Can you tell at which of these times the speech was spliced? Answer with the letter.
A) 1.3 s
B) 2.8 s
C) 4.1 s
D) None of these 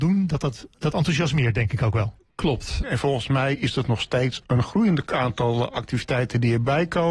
B